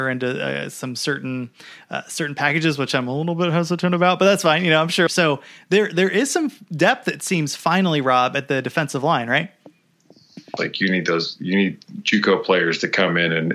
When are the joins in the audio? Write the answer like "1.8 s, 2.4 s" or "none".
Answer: 5.1 s, 10.6 s